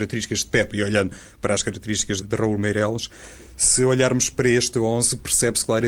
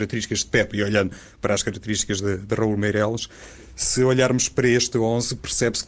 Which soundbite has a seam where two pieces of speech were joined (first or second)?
first